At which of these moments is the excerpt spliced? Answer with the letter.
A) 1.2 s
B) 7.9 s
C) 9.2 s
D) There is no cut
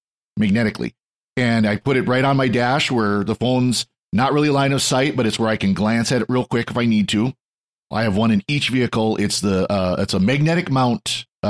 B